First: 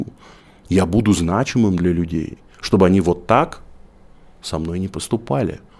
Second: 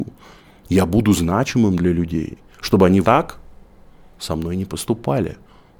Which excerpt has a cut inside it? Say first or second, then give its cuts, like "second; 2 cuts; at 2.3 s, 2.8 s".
second; 1 cut; at 3.0 s